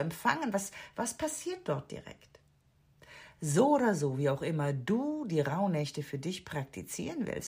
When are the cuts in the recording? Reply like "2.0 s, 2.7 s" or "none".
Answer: none